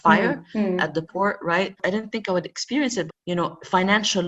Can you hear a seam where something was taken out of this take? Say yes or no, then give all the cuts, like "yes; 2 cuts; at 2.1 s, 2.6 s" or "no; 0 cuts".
yes; 2 cuts; at 1.8 s, 3.1 s